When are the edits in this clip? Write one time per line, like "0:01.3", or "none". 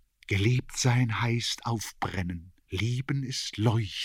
0:02.6